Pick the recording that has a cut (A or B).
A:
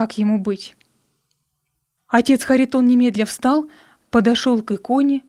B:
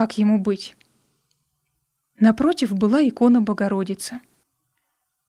A